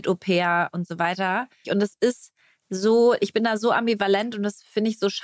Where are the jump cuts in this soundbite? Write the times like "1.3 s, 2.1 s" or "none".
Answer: 1.6 s